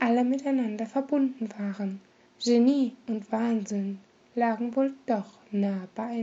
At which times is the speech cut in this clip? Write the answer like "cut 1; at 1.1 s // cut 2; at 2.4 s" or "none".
cut 1; at 2.3 s